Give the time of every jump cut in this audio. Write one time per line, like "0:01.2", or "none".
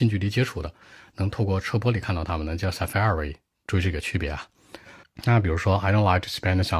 0:05.0